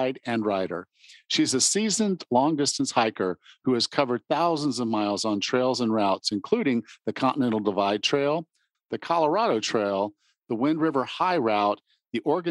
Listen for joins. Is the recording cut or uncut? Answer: cut